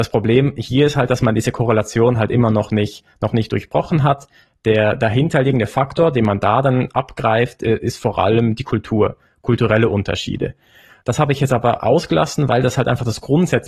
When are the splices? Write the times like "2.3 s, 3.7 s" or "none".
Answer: 11.0 s